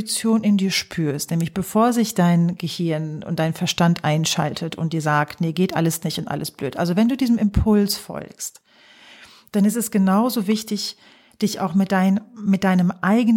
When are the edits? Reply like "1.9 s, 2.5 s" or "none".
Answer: none